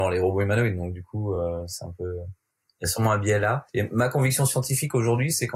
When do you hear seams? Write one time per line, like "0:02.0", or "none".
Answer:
none